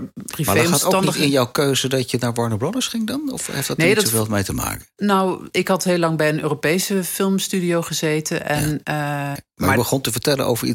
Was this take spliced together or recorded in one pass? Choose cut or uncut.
cut